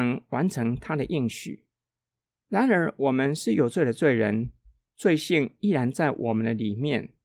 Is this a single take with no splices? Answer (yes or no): no